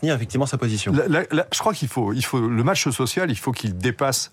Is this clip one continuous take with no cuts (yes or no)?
yes